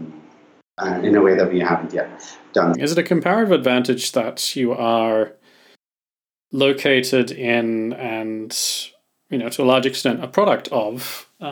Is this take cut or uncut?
cut